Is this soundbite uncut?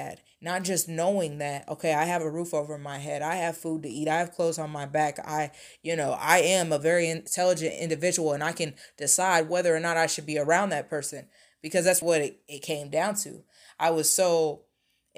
no; 1 cut; at 12.0 s

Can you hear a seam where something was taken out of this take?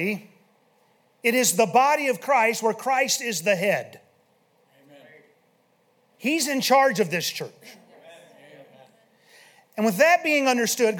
no; 0 cuts

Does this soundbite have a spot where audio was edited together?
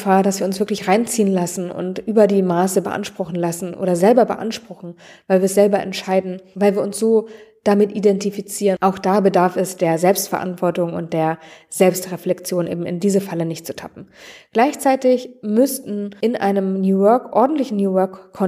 yes; 1 cut; at 8.8 s

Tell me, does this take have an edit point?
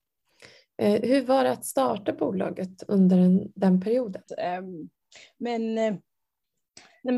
yes; 1 cut; at 4.3 s

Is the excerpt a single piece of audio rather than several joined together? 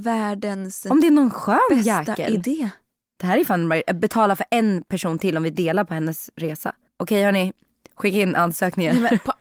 no; 1 cut; at 6.9 s

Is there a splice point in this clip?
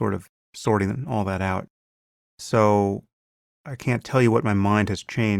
no; 0 cuts

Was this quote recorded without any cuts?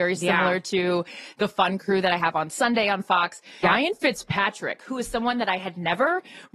no; 1 cut; at 3.6 s

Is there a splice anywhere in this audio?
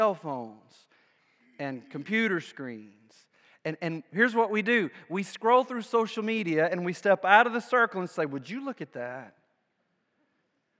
no; 0 cuts

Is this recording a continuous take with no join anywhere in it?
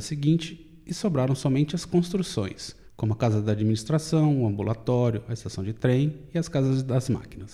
no; 1 cut; at 2.8 s

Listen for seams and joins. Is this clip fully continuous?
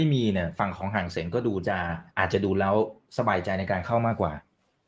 no; 1 cut; at 2.1 s

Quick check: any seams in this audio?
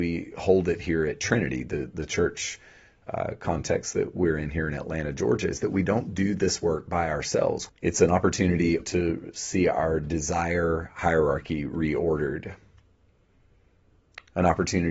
yes; 2 cuts; at 7.7 s, 8.8 s

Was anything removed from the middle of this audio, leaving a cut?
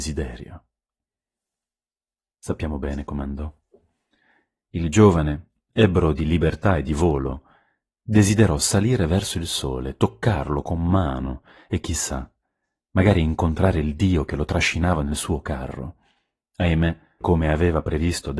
yes; 1 cut; at 17.2 s

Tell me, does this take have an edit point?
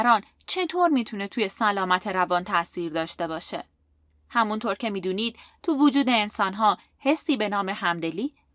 no; 0 cuts

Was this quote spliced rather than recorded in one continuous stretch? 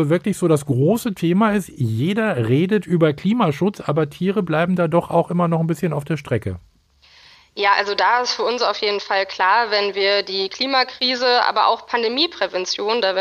no; 0 cuts

